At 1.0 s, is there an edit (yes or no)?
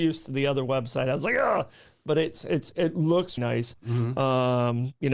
no